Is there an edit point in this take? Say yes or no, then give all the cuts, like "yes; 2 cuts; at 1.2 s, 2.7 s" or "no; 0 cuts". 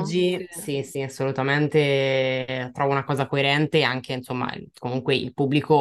no; 0 cuts